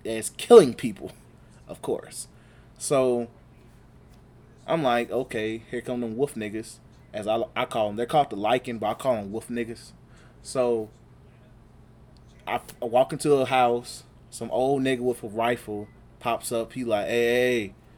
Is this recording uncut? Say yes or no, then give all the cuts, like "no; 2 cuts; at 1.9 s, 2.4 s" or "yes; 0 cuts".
yes; 0 cuts